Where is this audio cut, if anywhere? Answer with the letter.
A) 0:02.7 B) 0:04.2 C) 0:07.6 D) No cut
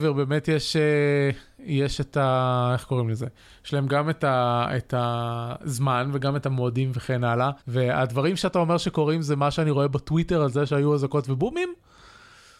C